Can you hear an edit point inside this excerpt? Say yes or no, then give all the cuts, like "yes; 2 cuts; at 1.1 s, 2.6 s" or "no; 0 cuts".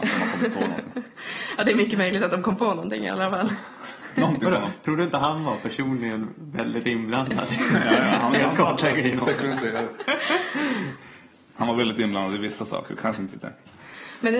yes; 1 cut; at 13.3 s